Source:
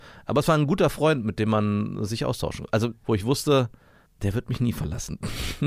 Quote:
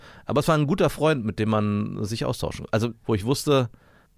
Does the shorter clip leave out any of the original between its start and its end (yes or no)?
no